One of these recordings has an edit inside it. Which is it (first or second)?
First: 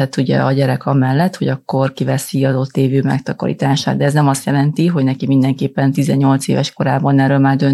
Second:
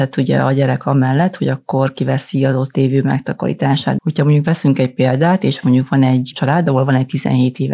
second